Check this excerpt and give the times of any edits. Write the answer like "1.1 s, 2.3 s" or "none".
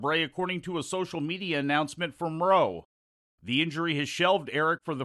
3.2 s